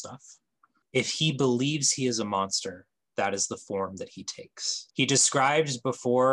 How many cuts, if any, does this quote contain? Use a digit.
1